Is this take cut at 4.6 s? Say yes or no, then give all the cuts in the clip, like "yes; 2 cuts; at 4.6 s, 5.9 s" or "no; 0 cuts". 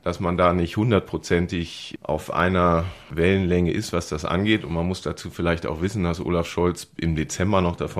no; 0 cuts